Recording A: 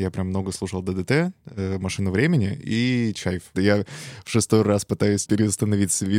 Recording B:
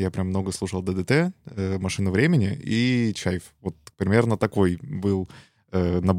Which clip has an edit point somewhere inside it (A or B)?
A